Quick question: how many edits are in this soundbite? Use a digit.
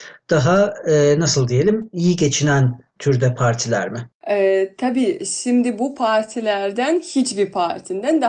1